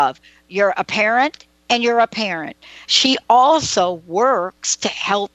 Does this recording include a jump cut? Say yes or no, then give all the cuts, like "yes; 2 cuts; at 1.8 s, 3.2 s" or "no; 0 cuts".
yes; 1 cut; at 2.8 s